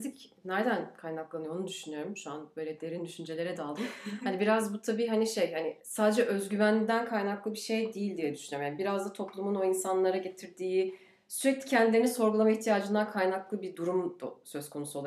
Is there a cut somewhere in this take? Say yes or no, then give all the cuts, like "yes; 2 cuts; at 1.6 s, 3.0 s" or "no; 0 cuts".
no; 0 cuts